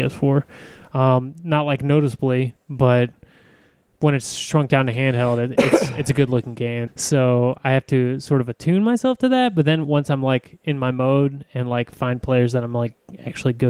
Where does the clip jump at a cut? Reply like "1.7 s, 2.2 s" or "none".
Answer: 6.9 s